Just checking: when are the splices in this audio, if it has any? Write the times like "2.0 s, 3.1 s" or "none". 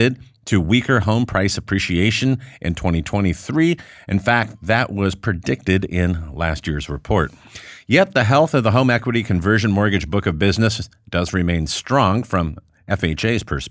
none

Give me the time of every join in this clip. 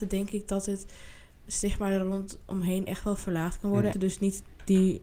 3.9 s

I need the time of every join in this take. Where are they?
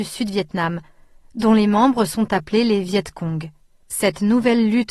3.8 s

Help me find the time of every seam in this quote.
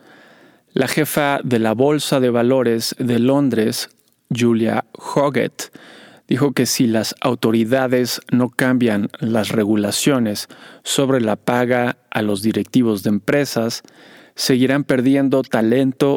none

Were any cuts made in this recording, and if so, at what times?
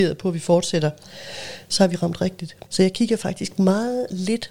2.7 s

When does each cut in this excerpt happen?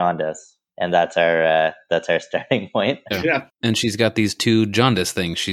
3.1 s

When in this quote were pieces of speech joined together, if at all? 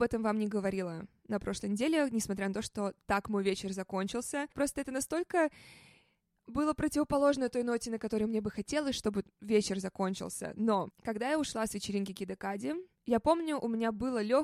none

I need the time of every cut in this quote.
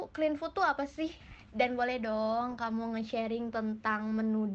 none

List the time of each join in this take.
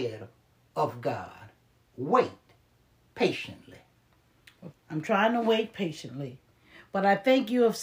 4.7 s

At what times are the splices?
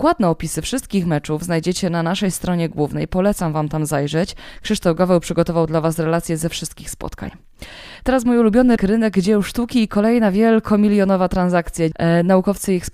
8.8 s, 11.9 s

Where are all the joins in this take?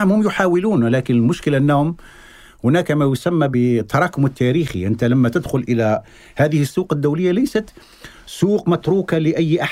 none

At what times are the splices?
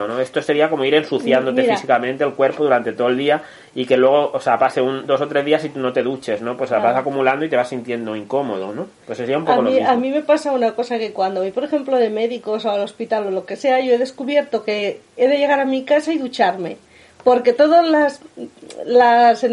none

